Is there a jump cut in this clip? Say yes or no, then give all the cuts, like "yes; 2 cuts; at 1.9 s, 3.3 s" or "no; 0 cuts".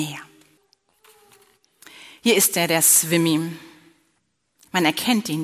no; 0 cuts